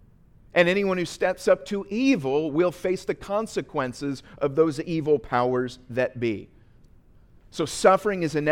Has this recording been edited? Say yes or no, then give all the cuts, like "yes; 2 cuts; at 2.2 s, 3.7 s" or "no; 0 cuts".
no; 0 cuts